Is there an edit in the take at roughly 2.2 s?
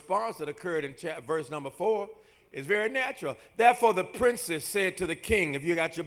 no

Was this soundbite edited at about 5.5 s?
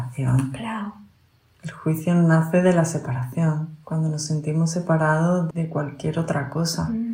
yes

